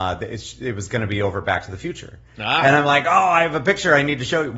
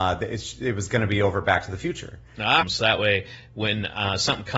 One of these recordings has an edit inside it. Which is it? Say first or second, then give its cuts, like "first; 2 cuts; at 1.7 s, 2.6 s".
second; 1 cut; at 2.6 s